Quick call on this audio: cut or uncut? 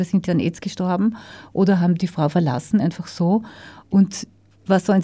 uncut